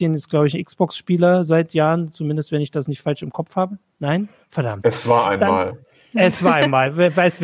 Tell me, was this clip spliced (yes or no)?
no